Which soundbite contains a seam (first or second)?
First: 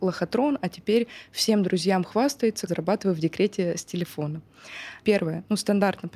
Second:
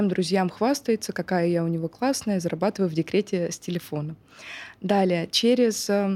first